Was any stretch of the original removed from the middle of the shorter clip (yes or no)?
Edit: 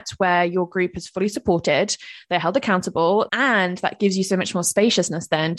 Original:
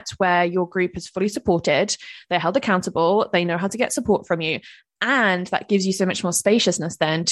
yes